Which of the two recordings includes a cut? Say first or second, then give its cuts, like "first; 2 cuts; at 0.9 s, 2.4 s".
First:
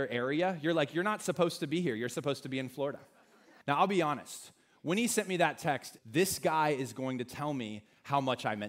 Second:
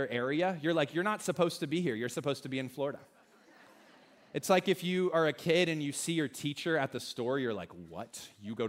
first; 2 cuts; at 3.6 s, 6.0 s